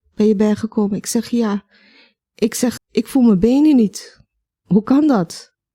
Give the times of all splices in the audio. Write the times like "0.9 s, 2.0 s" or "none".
2.8 s